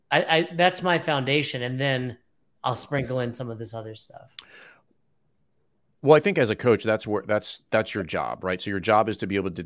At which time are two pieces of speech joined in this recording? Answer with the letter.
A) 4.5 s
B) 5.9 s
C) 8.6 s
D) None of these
D